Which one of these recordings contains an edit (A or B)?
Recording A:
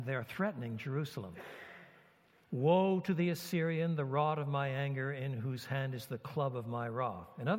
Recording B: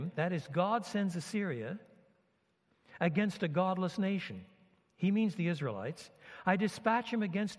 A